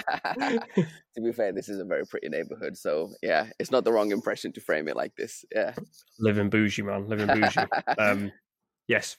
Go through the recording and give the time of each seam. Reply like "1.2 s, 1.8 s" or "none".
none